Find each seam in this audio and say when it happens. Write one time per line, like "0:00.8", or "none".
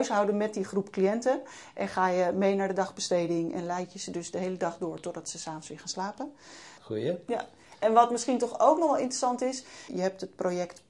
0:06.8
0:09.9